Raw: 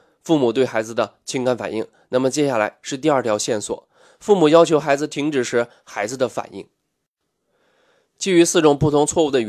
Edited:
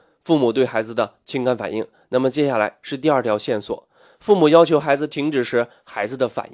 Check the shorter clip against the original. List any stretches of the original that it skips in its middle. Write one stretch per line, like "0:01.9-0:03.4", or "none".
none